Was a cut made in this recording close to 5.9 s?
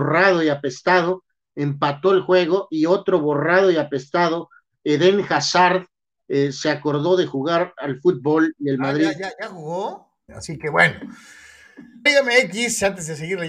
no; 2 cuts; at 10.3 s, 12.1 s

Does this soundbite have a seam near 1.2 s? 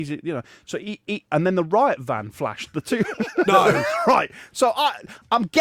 yes; 2 cuts; at 1.2 s, 3.5 s

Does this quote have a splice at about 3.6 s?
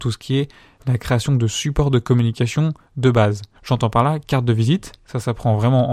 yes; 1 cut; at 3.6 s

